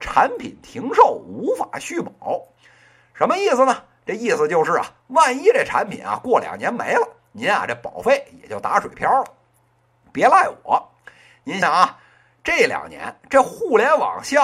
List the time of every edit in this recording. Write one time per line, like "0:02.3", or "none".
0:11.6